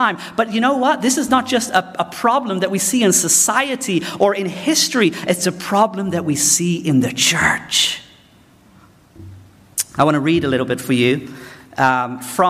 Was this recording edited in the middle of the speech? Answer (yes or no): no